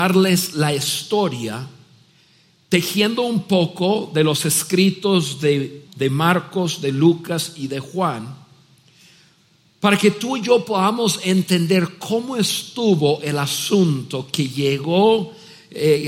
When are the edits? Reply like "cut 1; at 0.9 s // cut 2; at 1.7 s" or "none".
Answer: cut 1; at 5.9 s

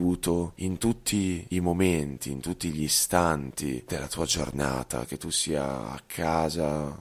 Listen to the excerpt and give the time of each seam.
cut 1; at 5.1 s

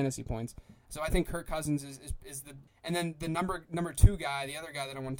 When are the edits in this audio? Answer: cut 1; at 2.7 s

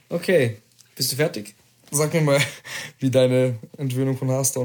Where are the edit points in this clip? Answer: cut 1; at 3.7 s

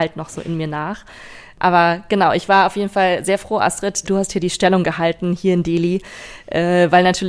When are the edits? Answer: cut 1; at 4.0 s

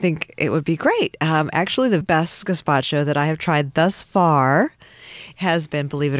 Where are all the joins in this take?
cut 1; at 2.0 s

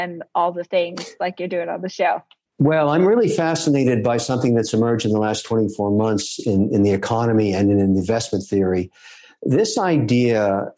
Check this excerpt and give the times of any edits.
none

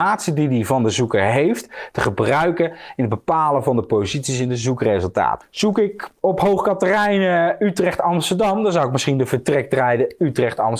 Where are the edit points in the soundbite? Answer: cut 1; at 5.4 s

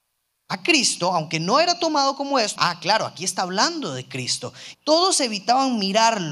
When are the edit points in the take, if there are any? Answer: cut 1; at 2.6 s // cut 2; at 4.7 s

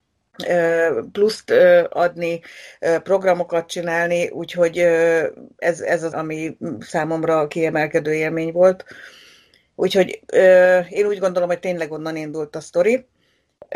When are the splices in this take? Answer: cut 1; at 6.1 s

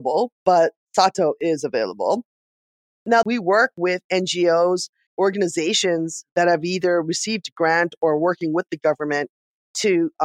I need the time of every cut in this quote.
cut 1; at 3.2 s // cut 2; at 5.1 s

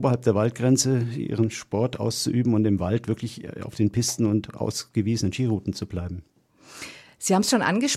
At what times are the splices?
none

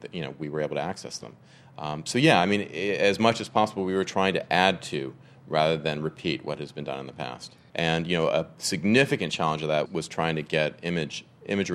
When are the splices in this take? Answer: cut 1; at 7.7 s // cut 2; at 9.9 s

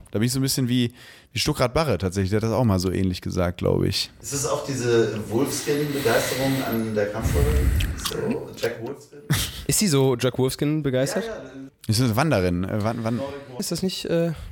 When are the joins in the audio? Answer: cut 1; at 11.7 s // cut 2; at 13.6 s

